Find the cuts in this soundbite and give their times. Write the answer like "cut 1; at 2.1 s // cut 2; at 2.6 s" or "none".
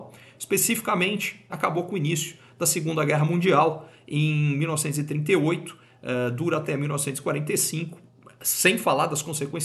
cut 1; at 1.5 s